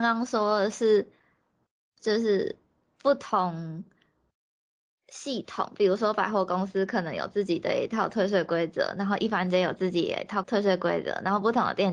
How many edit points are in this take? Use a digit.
1